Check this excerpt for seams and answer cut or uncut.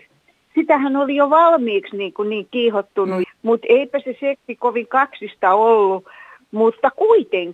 cut